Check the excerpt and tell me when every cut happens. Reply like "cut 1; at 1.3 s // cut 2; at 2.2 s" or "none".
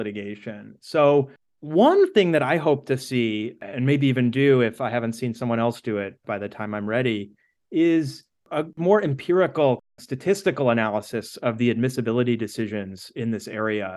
none